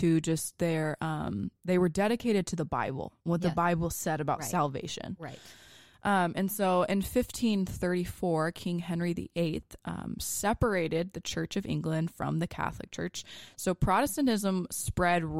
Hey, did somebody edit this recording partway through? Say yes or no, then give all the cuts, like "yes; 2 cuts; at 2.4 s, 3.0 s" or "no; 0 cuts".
no; 0 cuts